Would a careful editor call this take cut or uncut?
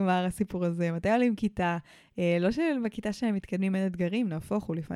uncut